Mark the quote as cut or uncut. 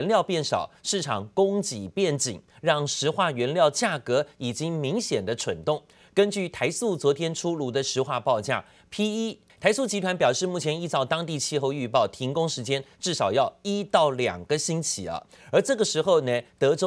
cut